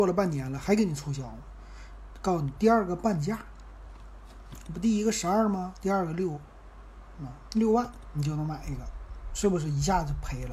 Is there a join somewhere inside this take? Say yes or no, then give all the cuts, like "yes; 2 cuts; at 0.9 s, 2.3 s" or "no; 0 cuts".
yes; 2 cuts; at 7.5 s, 9.3 s